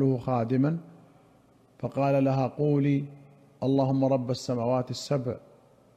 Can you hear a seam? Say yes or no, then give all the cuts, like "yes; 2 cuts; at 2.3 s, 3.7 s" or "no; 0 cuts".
no; 0 cuts